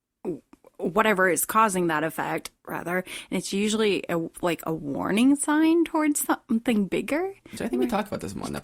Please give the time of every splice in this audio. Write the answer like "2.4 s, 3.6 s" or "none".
7.6 s